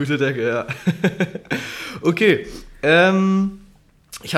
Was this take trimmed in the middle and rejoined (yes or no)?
no